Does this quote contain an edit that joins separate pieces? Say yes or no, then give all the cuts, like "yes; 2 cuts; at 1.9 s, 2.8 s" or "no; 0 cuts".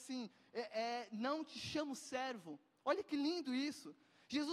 no; 0 cuts